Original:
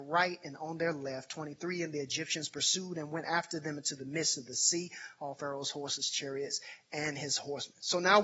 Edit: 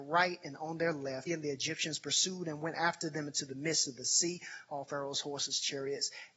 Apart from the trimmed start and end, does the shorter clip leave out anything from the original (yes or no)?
yes